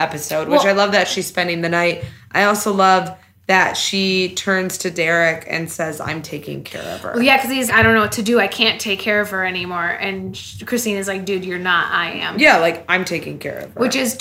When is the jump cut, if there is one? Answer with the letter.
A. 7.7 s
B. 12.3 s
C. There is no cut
A